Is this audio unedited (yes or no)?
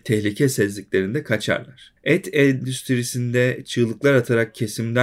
yes